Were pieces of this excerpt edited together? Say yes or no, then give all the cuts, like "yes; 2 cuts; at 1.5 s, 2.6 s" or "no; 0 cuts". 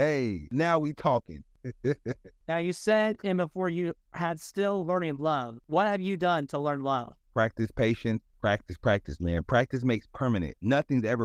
no; 0 cuts